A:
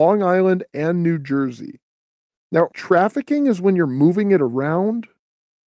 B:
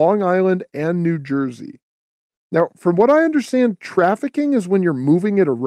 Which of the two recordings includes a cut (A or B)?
A